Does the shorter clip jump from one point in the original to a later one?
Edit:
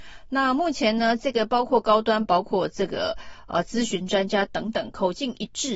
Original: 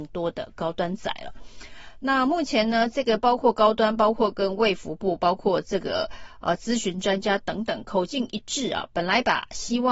yes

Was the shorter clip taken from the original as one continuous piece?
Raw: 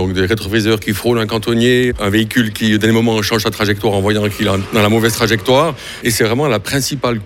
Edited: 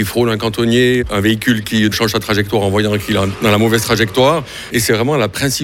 no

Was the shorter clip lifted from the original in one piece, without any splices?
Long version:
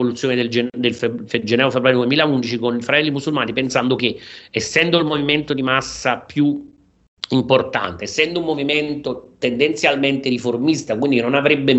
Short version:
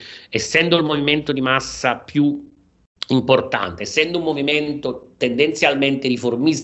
yes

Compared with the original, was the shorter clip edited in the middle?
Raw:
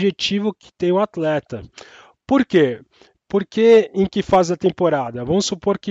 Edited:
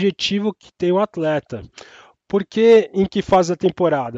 yes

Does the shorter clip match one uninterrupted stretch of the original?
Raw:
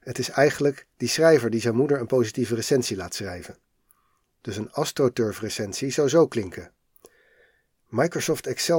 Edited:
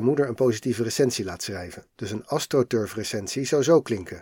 no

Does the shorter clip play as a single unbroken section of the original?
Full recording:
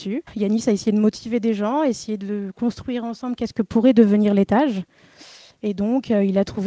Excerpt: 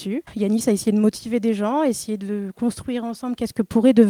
yes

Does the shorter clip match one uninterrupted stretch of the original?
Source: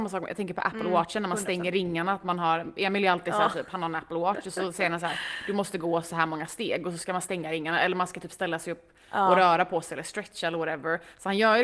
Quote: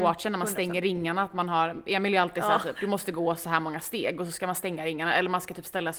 no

